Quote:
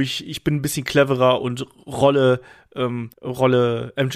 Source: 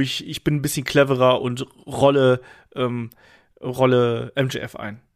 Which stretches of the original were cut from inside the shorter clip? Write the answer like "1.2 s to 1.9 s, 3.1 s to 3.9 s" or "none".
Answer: 3.1 s to 3.5 s